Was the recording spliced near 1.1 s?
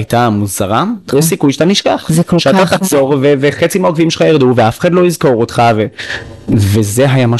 yes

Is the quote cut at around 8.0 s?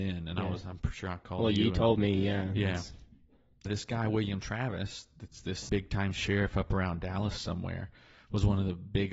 no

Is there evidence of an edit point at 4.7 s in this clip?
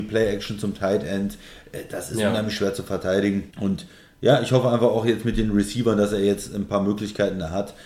no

